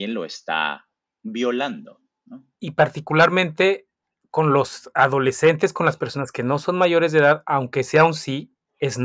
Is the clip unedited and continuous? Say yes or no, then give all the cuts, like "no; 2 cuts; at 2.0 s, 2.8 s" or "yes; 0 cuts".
no; 1 cut; at 2.5 s